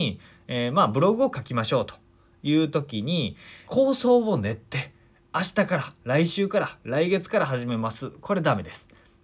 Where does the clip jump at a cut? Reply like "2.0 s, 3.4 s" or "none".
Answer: 3.7 s